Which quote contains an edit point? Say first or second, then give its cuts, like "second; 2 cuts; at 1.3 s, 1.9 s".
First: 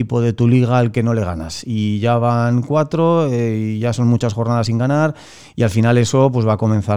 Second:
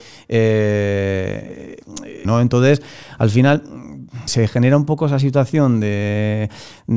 second; 2 cuts; at 2.3 s, 4.3 s